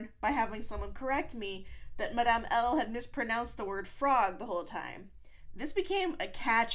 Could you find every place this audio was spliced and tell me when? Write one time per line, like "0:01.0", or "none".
0:05.5